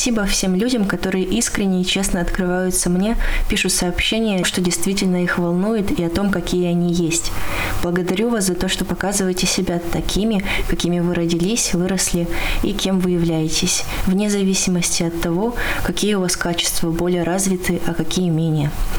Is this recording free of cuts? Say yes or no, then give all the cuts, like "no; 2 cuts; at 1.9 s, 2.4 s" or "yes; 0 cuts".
no; 1 cut; at 4.4 s